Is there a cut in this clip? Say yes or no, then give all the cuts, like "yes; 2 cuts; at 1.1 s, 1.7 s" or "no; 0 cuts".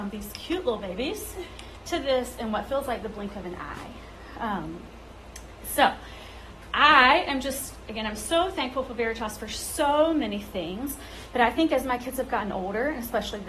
no; 0 cuts